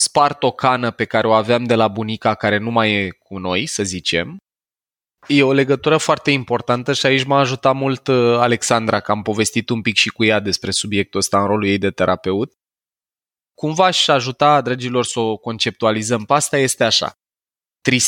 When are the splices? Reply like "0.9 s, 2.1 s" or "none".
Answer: 5.2 s